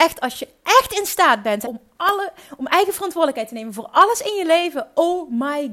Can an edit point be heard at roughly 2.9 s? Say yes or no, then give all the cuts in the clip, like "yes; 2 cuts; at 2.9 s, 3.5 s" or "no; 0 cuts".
no; 1 cut; at 1.6 s